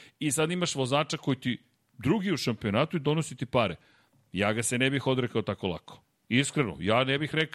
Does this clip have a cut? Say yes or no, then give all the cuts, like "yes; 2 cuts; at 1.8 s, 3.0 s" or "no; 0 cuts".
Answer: no; 0 cuts